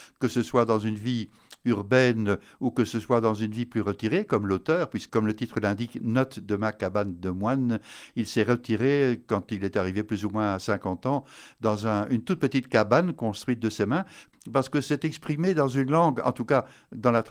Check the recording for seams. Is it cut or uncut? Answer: cut